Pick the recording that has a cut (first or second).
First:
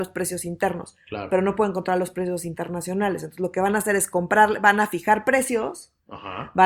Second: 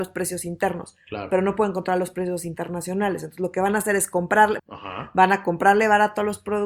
second